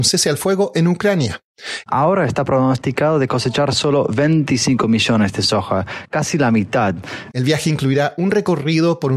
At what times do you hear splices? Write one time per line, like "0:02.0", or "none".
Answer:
0:01.9
0:07.3